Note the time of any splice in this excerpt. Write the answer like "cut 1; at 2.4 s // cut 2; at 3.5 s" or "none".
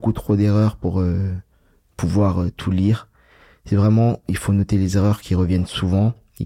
none